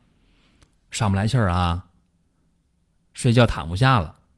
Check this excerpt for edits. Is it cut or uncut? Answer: uncut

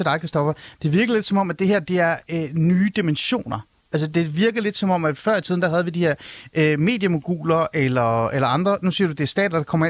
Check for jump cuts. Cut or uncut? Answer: uncut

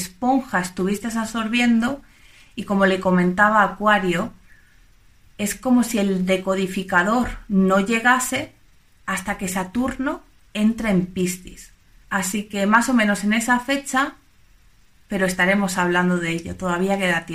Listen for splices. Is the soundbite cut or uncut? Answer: cut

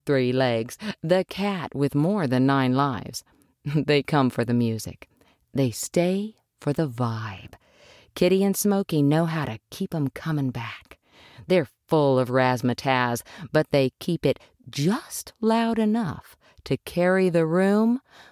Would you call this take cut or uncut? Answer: uncut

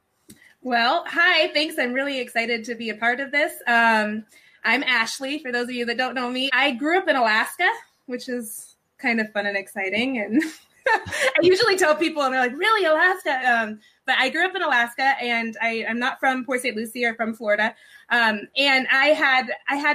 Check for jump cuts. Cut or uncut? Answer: cut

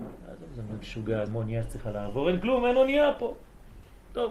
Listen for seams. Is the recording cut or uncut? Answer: cut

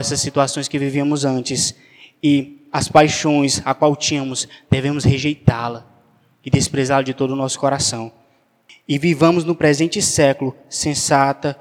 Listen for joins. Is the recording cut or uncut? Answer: uncut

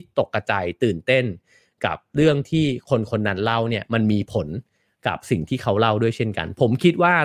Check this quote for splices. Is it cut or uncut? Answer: uncut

